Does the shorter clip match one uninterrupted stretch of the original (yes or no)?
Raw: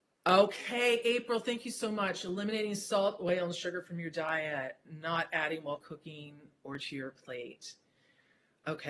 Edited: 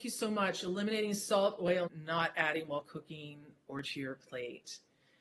no